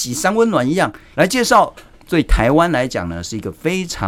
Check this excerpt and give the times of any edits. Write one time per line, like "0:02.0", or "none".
0:01.1